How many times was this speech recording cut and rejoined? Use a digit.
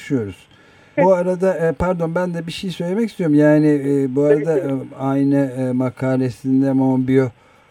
1